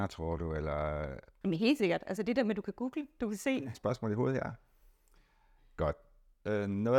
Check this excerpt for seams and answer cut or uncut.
cut